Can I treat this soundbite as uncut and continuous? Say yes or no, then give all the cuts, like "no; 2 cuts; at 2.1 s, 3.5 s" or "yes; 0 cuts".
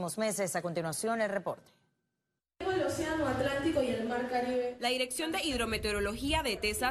yes; 0 cuts